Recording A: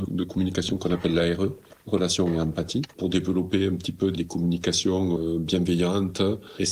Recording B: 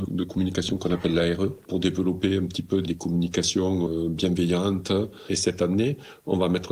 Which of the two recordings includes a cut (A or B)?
B